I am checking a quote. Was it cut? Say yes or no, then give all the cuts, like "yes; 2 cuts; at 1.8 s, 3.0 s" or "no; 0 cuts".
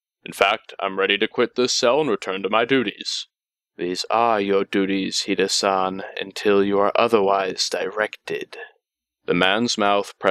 no; 0 cuts